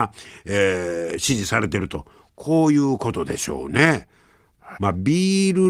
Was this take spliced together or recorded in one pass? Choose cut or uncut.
cut